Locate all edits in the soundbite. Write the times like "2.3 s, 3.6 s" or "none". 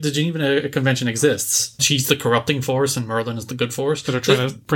1.8 s

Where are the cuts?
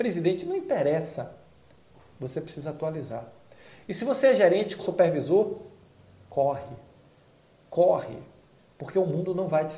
4.8 s

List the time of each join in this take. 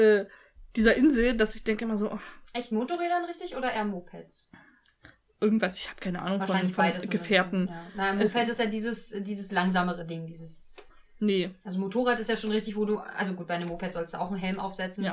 none

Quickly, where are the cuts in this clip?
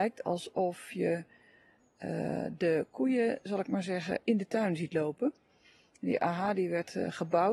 none

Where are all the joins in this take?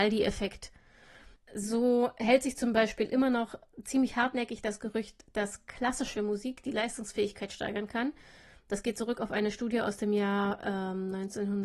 1.4 s

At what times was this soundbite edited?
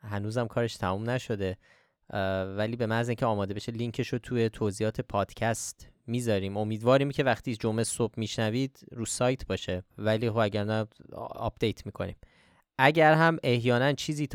9.9 s

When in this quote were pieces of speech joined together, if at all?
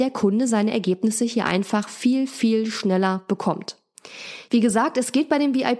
4.5 s

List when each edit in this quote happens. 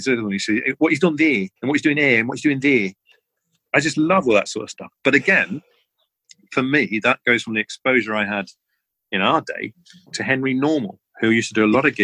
1.6 s

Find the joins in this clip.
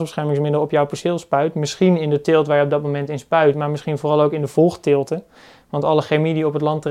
none

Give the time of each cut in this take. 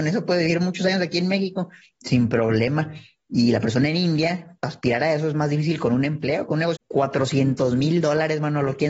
6.7 s

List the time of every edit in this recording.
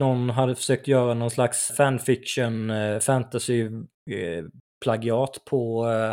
1.7 s

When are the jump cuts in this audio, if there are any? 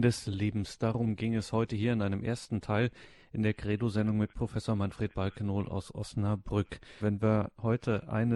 7.0 s

